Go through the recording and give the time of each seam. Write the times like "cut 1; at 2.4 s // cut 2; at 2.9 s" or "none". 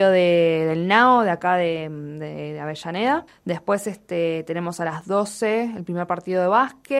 cut 1; at 3.3 s